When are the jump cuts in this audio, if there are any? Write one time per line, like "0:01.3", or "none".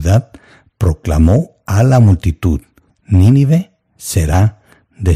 0:02.9